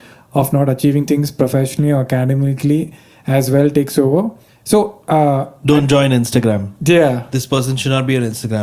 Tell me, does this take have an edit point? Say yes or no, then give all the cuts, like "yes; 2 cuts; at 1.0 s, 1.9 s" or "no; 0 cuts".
yes; 1 cut; at 4.5 s